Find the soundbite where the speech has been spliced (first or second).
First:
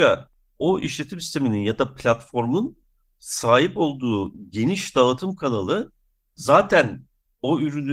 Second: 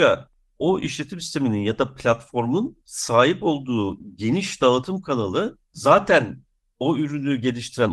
second